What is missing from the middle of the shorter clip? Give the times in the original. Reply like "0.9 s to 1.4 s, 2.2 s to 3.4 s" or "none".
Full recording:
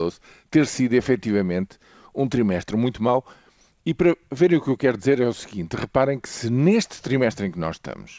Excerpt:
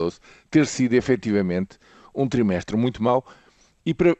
none

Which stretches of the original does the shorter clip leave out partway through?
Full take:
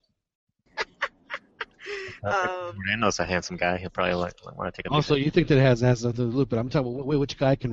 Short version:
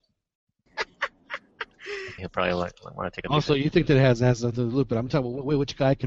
2.2 s to 3.8 s

